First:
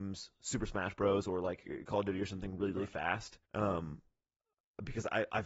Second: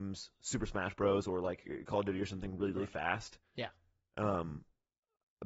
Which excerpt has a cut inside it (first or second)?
first